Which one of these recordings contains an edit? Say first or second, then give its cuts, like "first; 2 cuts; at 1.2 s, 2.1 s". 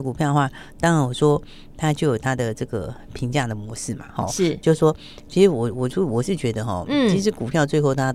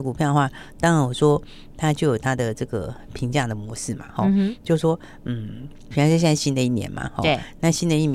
first; 1 cut; at 4.2 s